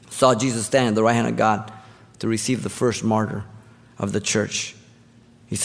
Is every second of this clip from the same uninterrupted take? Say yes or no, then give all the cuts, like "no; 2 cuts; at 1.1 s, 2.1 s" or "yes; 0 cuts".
yes; 0 cuts